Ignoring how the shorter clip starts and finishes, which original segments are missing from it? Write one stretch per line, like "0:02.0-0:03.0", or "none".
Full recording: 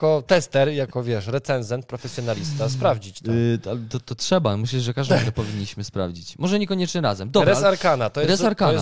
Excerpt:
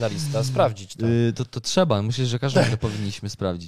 0:03.6-0:03.9